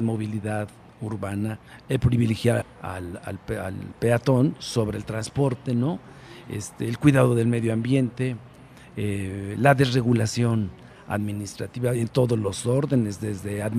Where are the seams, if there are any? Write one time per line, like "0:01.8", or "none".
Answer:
0:02.6